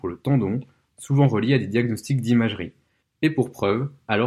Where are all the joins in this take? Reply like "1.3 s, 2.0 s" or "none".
3.0 s